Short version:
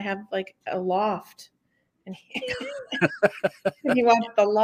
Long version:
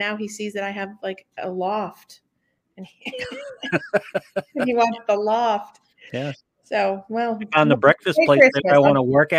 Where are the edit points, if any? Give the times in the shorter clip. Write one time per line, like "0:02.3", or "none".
none